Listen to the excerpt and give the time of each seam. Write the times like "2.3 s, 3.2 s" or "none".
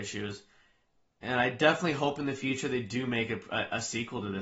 none